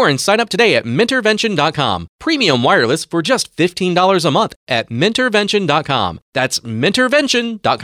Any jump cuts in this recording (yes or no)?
no